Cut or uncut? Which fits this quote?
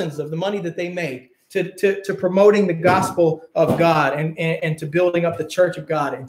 uncut